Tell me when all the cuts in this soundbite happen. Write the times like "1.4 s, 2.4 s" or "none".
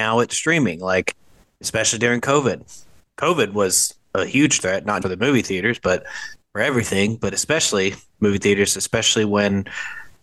5.0 s